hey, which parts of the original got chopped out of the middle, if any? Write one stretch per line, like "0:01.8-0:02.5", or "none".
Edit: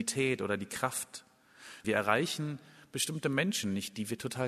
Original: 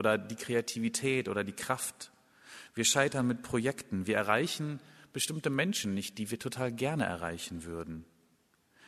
0:02.7-0:04.1